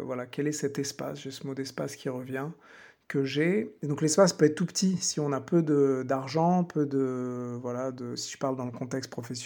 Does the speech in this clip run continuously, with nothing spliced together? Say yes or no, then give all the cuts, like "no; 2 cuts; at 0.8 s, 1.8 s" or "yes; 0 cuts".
yes; 0 cuts